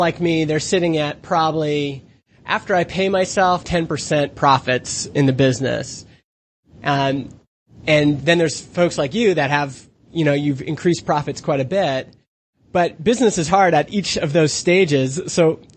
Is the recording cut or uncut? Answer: cut